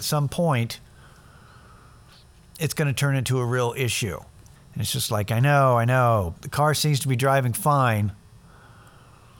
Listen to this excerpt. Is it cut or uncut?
cut